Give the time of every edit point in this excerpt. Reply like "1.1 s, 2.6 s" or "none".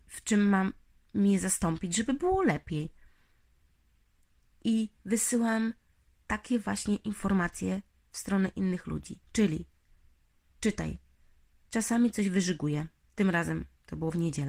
9.2 s